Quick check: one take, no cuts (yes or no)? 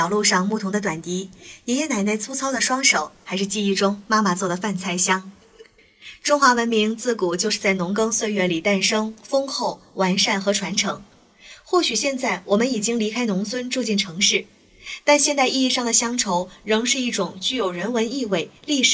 yes